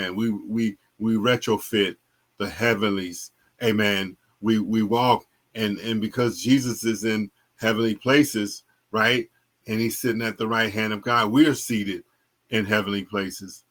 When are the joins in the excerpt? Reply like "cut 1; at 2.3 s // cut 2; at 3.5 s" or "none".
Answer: none